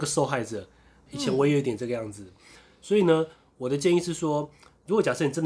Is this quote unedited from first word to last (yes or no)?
no